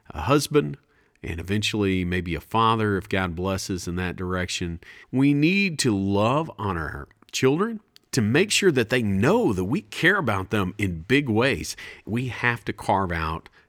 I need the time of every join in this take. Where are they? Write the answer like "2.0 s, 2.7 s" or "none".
5.0 s, 8.1 s, 12.0 s